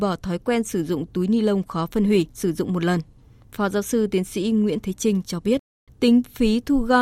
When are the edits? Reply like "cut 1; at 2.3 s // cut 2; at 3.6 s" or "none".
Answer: cut 1; at 2.3 s // cut 2; at 5.9 s